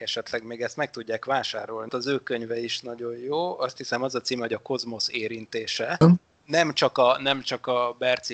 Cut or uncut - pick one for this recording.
cut